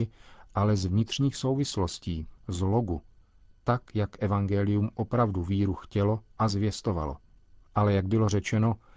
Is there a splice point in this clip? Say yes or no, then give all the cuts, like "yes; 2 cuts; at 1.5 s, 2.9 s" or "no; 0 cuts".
no; 0 cuts